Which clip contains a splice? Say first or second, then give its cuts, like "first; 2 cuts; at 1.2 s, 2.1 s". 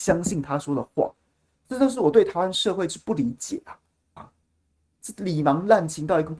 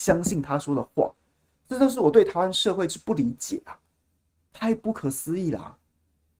first; 1 cut; at 4.2 s